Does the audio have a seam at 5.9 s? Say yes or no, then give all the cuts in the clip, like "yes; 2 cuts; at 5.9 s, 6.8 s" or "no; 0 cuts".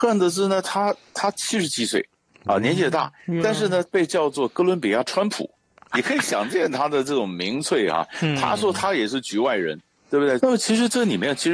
yes; 2 cuts; at 5.9 s, 10.4 s